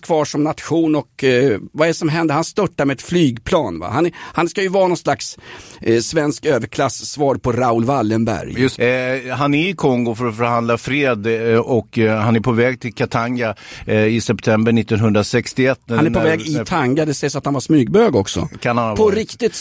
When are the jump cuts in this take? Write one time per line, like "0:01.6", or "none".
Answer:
0:08.7